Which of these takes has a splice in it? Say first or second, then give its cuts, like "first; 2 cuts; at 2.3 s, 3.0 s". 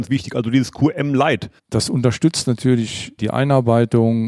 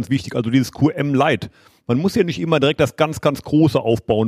first; 2 cuts; at 1.6 s, 3.2 s